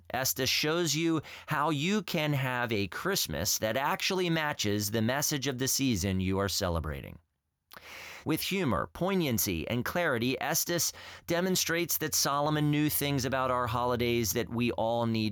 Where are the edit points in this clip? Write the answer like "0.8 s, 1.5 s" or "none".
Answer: 8.2 s